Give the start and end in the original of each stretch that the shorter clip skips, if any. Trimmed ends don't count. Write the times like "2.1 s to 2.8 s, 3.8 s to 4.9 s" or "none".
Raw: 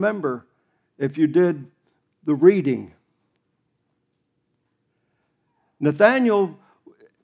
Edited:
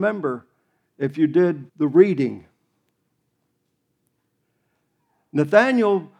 1.7 s to 2.2 s